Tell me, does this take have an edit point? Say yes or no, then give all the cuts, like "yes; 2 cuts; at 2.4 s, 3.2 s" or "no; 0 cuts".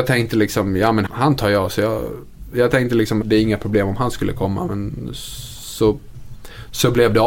yes; 2 cuts; at 1.1 s, 3.2 s